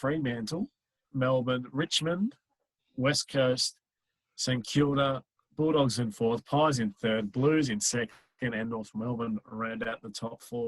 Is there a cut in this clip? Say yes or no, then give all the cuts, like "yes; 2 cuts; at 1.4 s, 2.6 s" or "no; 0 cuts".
yes; 1 cut; at 1.0 s